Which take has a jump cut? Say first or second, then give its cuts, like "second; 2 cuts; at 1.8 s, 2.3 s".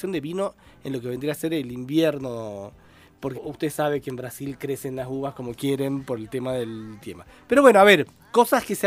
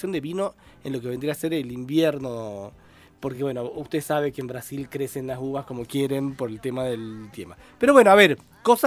first; 1 cut; at 3.3 s